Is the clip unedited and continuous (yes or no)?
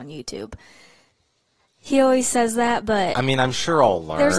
yes